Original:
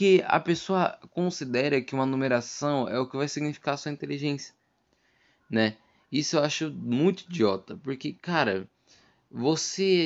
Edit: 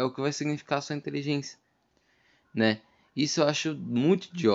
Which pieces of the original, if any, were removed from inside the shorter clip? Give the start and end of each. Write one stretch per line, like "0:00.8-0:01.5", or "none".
none